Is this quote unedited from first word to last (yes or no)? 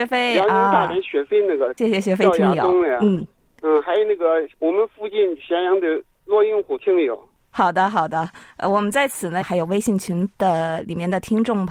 no